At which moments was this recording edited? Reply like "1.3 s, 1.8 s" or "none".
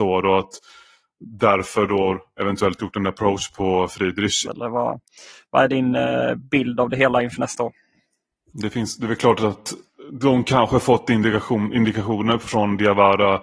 4.4 s, 8.5 s